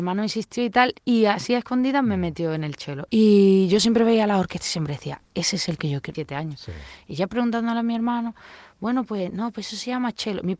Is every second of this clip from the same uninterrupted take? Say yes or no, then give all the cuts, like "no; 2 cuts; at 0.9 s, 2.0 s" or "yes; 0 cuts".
no; 2 cuts; at 3.1 s, 6.1 s